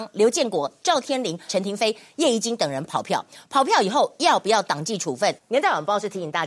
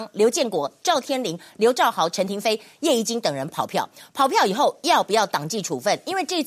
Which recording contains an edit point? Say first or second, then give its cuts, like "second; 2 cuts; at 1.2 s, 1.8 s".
first; 2 cuts; at 1.5 s, 5.4 s